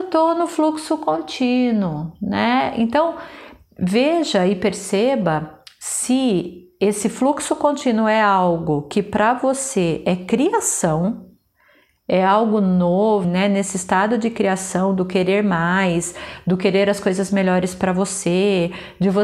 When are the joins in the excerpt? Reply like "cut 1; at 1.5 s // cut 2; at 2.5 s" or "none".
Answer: cut 1; at 13.2 s